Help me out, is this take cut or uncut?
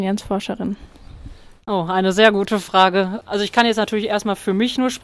uncut